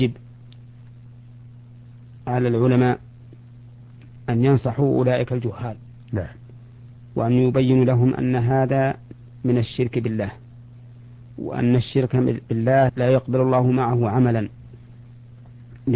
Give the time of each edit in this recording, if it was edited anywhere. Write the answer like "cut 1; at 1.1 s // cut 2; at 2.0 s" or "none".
cut 1; at 12.9 s